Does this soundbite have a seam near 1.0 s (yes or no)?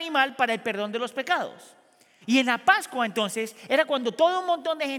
no